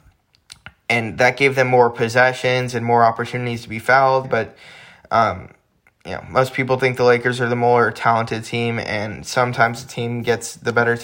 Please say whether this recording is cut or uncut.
cut